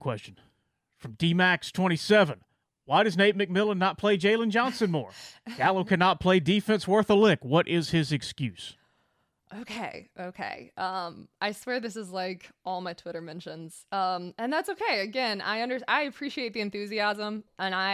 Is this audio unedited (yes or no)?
yes